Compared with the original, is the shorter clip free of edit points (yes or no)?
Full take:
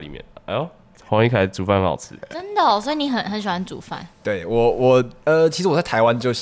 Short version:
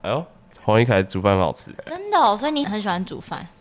no